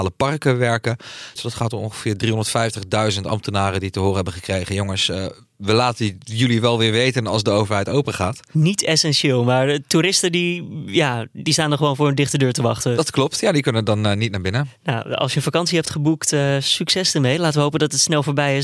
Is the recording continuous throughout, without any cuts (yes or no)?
no